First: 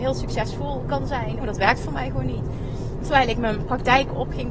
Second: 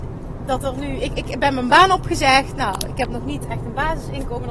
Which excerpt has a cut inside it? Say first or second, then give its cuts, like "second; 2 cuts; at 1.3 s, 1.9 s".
first; 2 cuts; at 1.4 s, 3.0 s